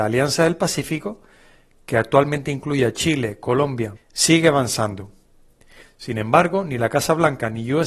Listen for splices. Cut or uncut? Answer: cut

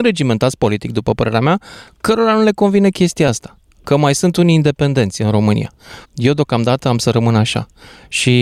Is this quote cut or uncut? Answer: cut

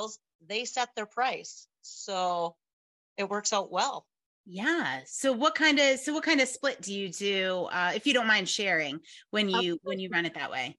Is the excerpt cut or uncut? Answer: uncut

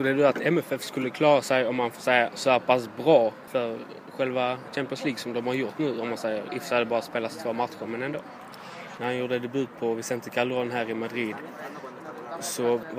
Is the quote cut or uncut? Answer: cut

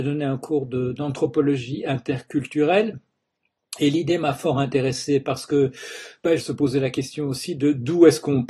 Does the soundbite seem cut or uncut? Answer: cut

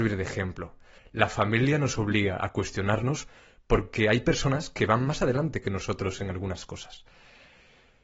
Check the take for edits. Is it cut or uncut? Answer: cut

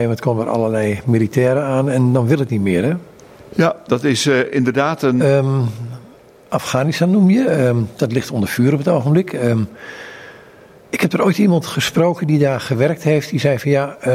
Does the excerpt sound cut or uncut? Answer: cut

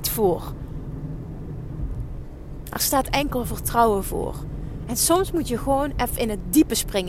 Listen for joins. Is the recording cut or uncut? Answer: uncut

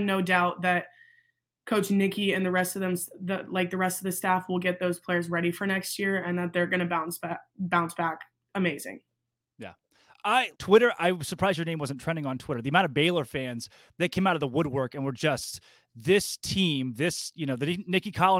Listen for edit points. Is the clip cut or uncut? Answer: cut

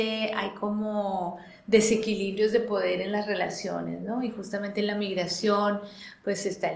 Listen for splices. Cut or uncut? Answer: uncut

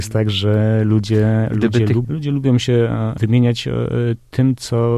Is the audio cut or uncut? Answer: cut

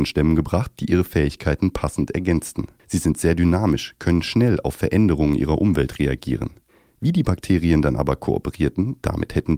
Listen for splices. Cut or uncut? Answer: cut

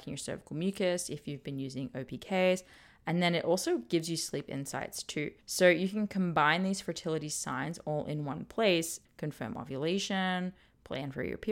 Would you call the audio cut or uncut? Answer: cut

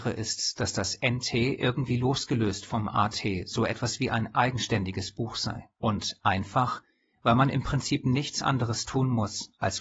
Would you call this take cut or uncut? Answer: cut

